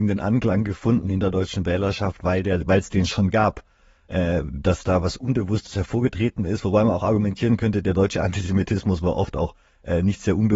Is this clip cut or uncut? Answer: uncut